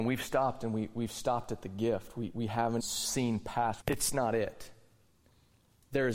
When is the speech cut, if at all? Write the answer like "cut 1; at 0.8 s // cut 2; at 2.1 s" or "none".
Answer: cut 1; at 2.8 s // cut 2; at 3.8 s

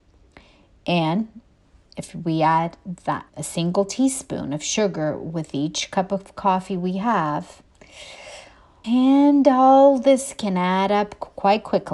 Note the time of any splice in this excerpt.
cut 1; at 3.3 s // cut 2; at 8.8 s

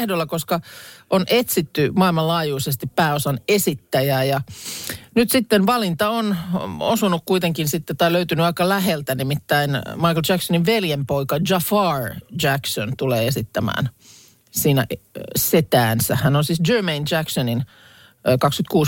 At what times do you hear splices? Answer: none

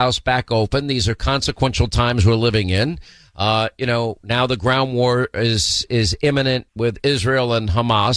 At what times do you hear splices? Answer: cut 1; at 6.7 s

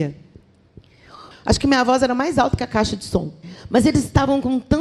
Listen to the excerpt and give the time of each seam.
cut 1; at 1.3 s

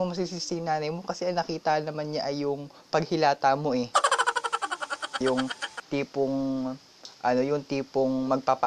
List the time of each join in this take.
cut 1; at 5.2 s

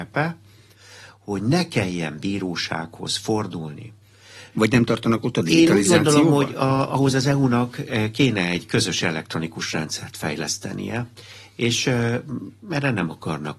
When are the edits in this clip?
cut 1; at 4.5 s

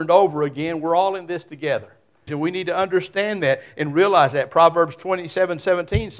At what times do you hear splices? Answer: cut 1; at 2.3 s

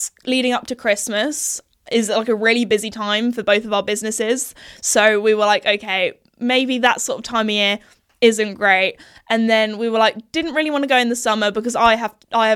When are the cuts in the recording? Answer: none

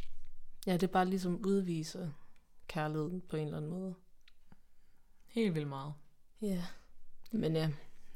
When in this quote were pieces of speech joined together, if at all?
cut 1; at 6.3 s

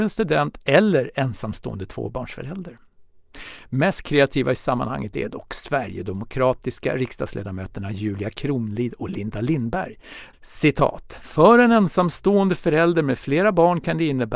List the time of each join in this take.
cut 1; at 10.3 s

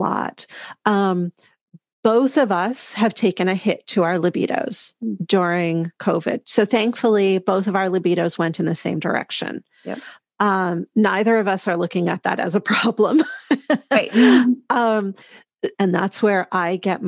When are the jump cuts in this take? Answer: cut 1; at 15.7 s

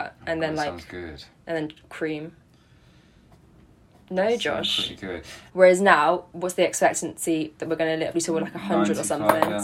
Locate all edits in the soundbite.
cut 1; at 5.5 s // cut 2; at 8.1 s

